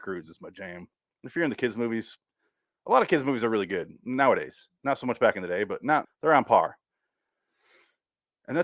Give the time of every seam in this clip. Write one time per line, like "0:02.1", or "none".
0:06.0